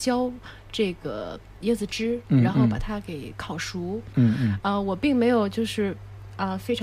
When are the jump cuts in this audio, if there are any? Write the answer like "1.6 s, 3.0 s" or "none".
4.1 s